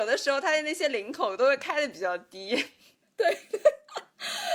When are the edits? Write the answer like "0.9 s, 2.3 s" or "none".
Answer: none